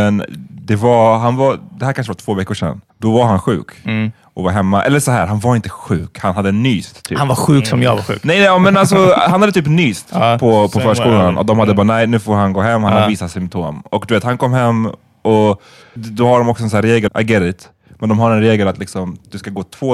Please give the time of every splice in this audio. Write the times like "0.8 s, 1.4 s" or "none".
2.9 s, 16.0 s, 17.1 s